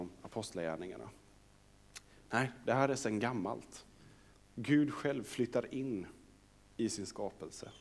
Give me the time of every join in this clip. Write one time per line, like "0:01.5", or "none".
0:04.3